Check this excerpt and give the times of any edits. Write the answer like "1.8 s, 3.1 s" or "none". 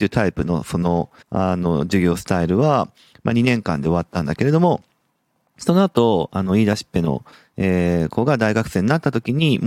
1.2 s